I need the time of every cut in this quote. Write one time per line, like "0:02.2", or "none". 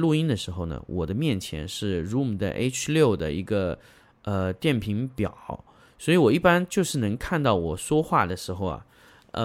none